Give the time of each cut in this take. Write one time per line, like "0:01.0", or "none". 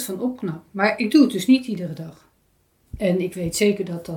0:02.9